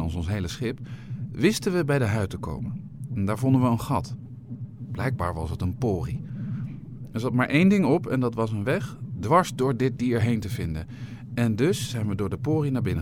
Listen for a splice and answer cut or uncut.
uncut